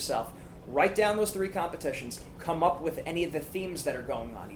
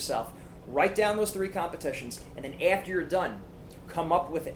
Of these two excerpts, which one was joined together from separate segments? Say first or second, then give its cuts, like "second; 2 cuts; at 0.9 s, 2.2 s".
first; 1 cut; at 2.3 s